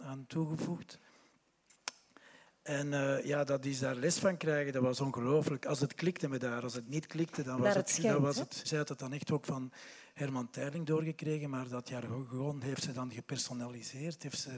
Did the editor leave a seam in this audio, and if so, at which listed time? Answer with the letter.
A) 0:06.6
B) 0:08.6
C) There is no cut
B